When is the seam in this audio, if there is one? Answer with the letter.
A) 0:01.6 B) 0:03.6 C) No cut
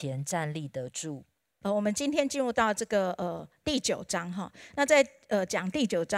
A